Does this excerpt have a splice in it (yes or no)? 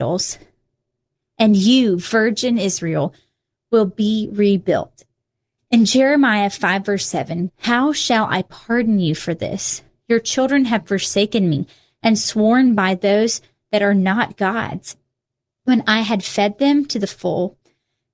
yes